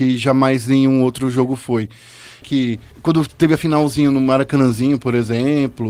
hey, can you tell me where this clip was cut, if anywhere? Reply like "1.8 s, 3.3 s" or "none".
2.4 s